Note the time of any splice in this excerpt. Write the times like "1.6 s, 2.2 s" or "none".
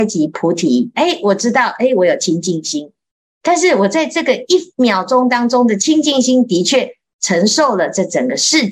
none